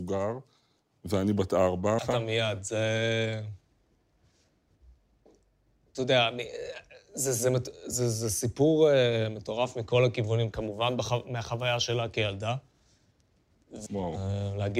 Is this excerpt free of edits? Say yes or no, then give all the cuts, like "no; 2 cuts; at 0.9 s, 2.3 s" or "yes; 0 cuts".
no; 3 cuts; at 2.0 s, 10.5 s, 13.9 s